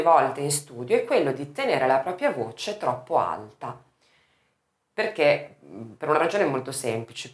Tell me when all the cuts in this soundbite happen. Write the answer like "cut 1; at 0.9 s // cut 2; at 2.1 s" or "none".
none